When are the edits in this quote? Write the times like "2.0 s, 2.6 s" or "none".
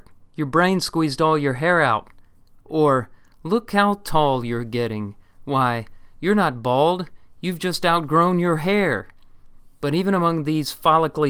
none